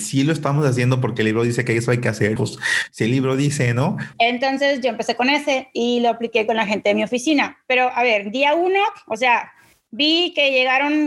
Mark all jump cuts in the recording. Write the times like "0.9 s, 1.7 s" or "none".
2.4 s, 4.1 s